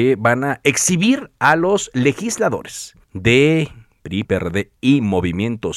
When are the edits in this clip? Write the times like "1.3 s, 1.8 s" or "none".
3.0 s, 4.2 s